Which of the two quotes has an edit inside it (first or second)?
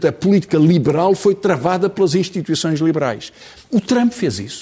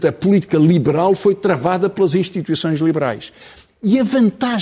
first